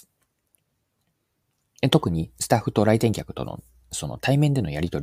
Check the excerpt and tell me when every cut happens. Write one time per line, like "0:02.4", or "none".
none